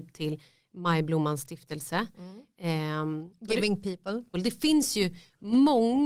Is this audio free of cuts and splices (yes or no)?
no